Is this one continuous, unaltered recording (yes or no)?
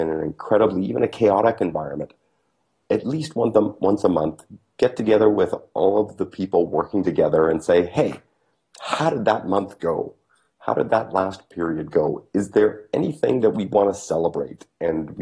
yes